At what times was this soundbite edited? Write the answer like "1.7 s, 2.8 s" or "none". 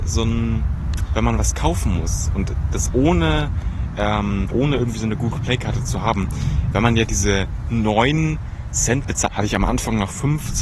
4.5 s, 6.7 s, 9.3 s